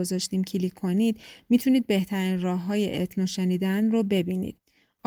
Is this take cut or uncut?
uncut